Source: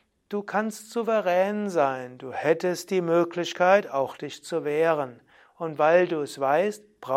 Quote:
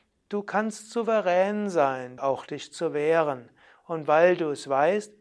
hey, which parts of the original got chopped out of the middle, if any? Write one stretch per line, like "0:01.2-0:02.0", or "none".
0:02.2-0:03.9